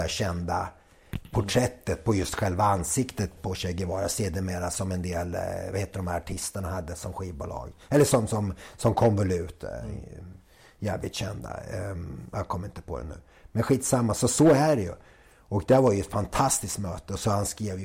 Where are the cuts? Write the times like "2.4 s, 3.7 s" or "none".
3.4 s